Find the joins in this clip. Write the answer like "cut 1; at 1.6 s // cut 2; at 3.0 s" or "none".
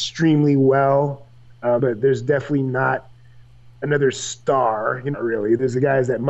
cut 1; at 1.8 s // cut 2; at 5.1 s